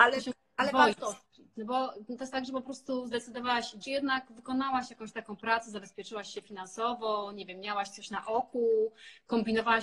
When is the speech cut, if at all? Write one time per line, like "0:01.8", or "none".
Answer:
0:01.5
0:03.8